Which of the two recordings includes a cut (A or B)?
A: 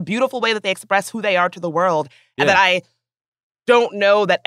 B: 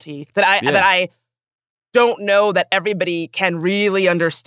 A